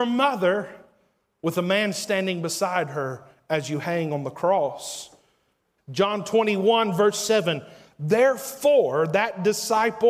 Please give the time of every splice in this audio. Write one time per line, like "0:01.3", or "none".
0:05.8